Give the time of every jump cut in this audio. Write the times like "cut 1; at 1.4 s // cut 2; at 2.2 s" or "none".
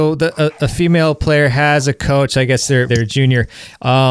cut 1; at 2.9 s